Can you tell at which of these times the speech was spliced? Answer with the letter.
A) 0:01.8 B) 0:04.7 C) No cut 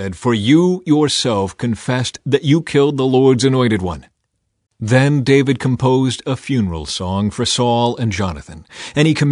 B